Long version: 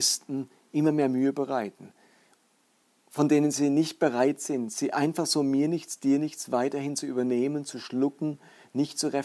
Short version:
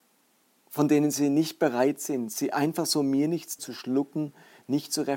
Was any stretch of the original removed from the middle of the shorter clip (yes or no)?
yes